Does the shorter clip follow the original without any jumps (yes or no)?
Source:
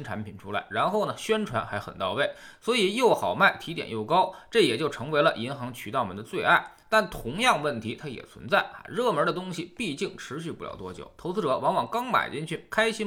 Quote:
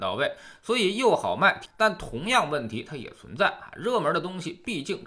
no